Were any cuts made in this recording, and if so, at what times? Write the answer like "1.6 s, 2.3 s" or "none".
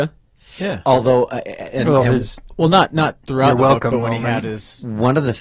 none